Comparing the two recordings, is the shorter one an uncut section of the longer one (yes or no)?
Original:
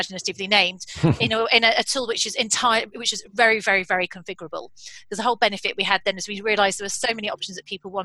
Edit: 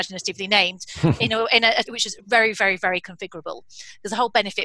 no